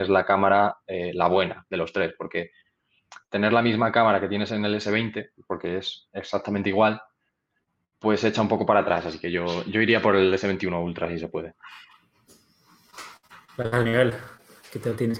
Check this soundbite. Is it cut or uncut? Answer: uncut